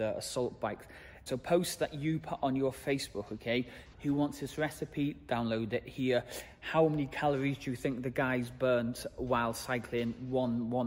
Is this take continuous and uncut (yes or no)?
no